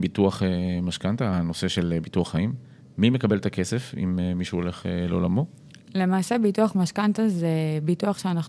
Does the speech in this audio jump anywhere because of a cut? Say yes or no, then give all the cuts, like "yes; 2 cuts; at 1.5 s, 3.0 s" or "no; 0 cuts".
no; 0 cuts